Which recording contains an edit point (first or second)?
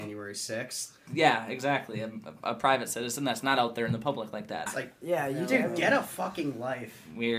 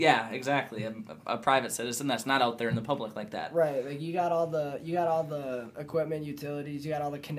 first